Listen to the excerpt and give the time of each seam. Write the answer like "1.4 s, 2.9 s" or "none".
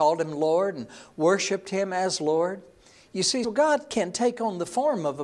3.4 s